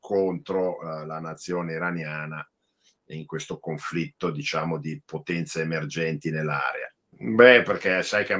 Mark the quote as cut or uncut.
cut